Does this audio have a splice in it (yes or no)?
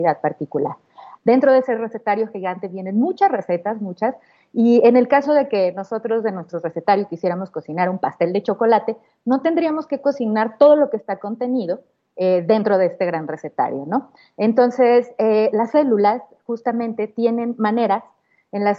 yes